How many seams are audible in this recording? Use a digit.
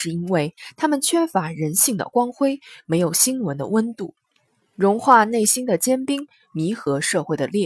0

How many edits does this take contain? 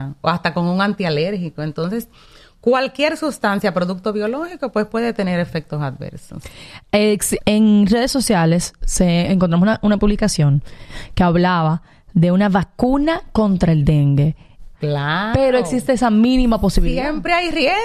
2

